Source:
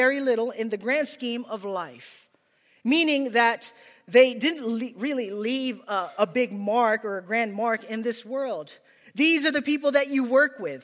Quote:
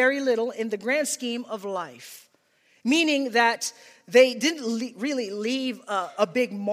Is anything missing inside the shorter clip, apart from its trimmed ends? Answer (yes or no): no